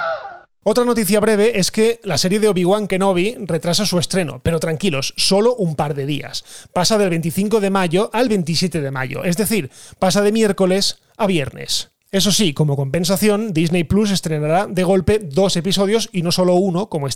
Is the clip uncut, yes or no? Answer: yes